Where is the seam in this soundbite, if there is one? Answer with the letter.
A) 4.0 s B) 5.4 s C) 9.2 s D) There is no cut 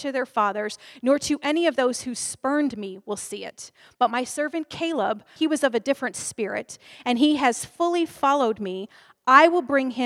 B